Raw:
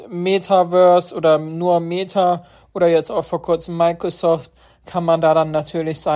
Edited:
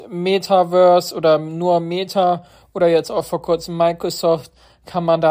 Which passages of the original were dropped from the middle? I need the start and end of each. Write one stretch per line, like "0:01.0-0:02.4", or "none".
none